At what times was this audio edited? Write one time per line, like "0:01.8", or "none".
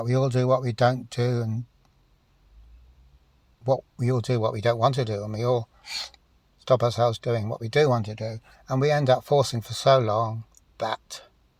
none